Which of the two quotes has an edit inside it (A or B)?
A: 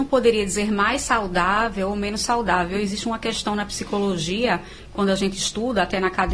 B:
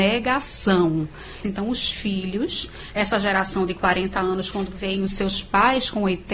B